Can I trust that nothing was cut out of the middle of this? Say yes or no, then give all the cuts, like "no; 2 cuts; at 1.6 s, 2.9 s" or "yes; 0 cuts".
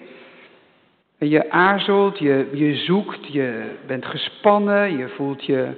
no; 1 cut; at 1.0 s